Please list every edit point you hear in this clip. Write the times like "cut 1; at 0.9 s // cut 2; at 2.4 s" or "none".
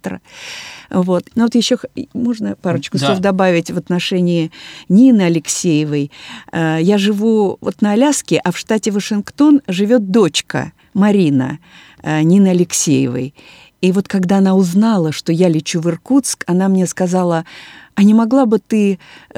cut 1; at 1.3 s